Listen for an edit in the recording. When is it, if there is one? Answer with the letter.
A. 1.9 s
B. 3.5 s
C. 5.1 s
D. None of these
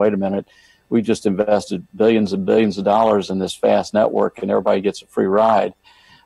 A